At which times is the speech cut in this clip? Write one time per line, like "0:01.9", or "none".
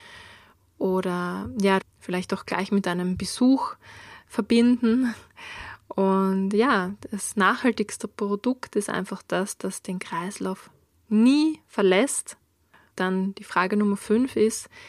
0:01.8
0:12.9